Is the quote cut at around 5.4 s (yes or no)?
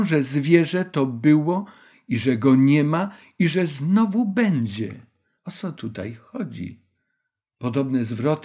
no